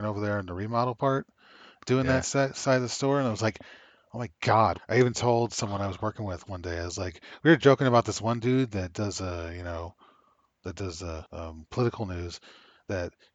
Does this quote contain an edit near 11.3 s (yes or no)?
yes